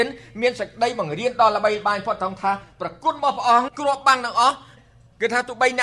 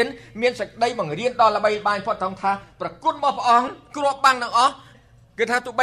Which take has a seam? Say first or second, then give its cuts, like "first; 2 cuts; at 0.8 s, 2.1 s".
first; 1 cut; at 3.7 s